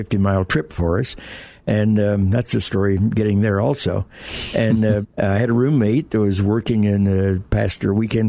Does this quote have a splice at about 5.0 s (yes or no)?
yes